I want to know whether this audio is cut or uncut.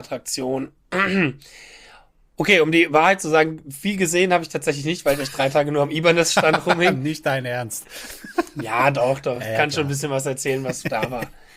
uncut